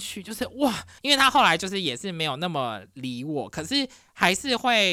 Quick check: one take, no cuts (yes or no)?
no